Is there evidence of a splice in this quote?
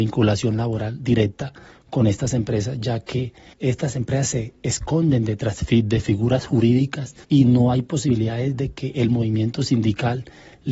yes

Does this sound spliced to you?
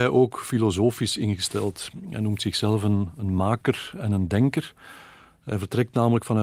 no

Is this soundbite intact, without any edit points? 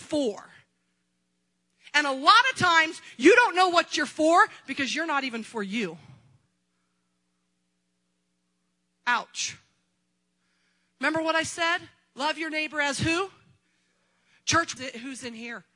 no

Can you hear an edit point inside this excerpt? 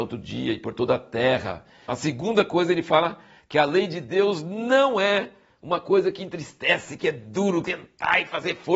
yes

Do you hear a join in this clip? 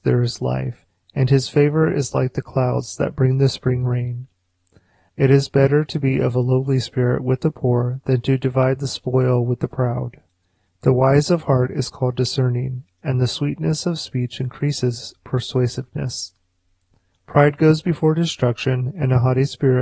yes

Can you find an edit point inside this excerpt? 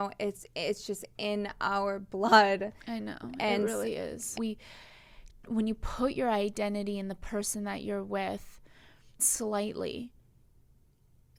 yes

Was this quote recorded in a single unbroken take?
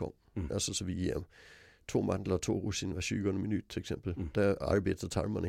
yes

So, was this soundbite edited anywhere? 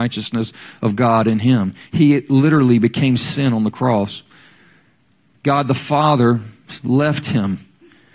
no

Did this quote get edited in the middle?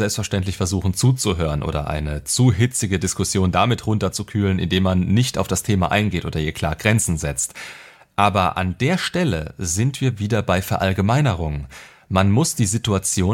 no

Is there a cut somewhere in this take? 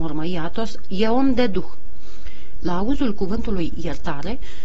yes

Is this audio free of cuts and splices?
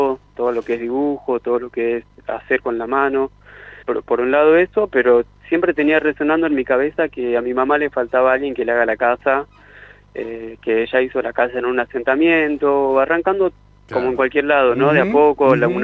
no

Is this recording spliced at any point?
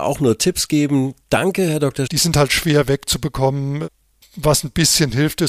yes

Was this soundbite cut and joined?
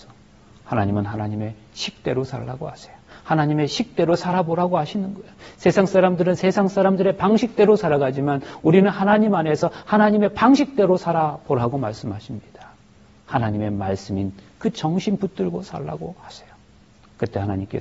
no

